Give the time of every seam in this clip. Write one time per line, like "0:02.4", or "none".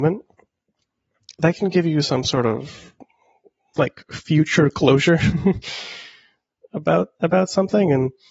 none